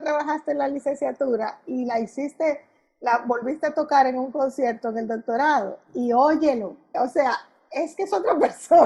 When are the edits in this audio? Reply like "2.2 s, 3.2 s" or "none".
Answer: 6.9 s